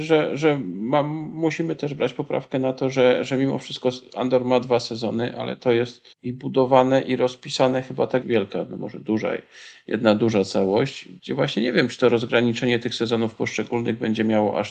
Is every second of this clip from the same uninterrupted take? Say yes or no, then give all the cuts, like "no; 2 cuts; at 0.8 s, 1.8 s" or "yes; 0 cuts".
no; 3 cuts; at 6.1 s, 8.2 s, 11.2 s